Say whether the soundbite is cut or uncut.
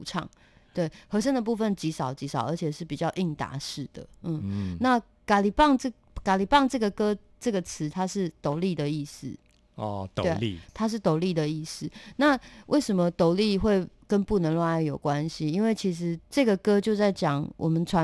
cut